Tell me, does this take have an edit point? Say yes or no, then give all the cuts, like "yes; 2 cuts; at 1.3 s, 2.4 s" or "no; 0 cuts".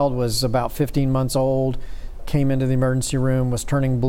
yes; 1 cut; at 2.2 s